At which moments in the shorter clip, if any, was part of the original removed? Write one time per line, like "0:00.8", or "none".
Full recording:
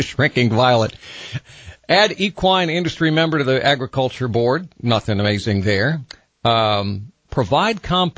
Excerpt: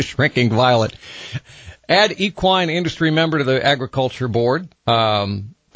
0:04.7